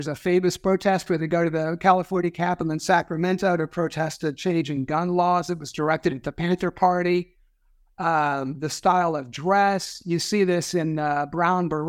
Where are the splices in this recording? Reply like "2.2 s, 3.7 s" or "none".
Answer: none